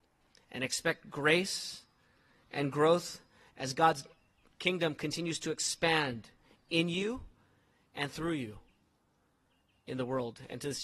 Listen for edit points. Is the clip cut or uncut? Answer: uncut